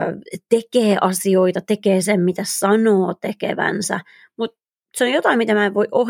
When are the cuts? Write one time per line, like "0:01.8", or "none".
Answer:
none